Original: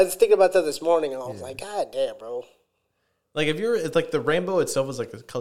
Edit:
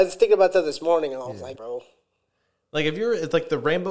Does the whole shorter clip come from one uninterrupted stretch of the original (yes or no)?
no